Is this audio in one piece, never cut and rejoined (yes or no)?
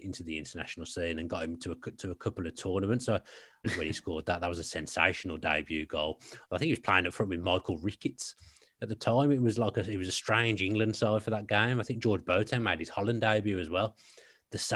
no